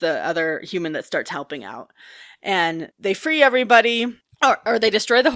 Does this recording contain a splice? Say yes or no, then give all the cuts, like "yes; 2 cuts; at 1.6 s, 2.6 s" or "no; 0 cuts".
no; 0 cuts